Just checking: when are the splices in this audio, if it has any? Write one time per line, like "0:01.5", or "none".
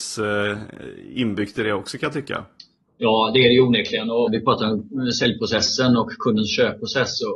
0:04.3

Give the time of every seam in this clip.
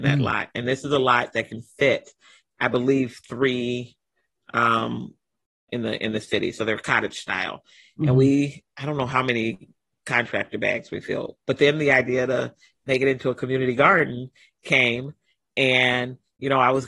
0:05.7

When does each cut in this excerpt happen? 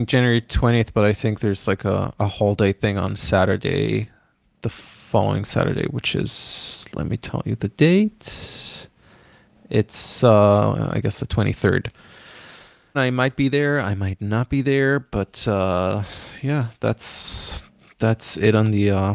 0:12.9

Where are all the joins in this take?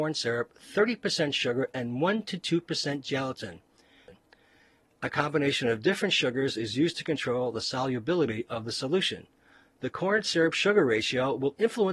none

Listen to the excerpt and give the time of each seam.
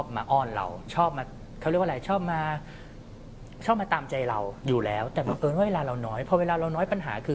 0:04.6

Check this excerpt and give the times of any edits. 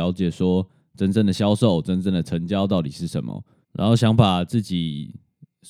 0:03.6

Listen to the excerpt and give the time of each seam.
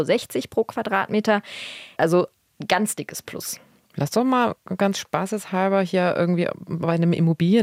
0:02.0

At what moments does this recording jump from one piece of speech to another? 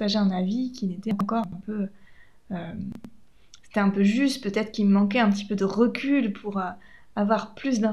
none

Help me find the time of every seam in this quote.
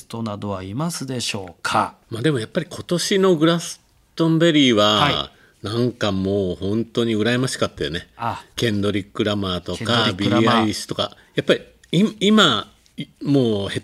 0:02.0
0:08.5

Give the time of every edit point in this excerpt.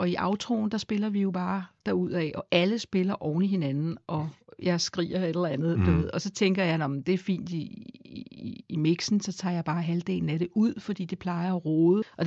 none

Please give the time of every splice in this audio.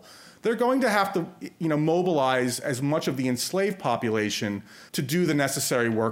0:04.9

